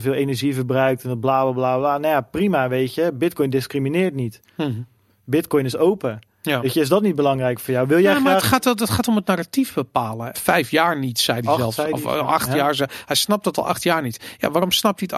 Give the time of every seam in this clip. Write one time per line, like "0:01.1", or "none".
0:10.3